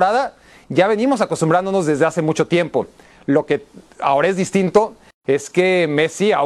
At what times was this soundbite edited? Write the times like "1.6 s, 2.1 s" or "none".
none